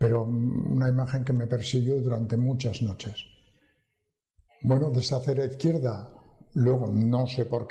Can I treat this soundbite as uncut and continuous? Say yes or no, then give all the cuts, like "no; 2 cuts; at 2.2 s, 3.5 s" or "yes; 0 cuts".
no; 1 cut; at 4.5 s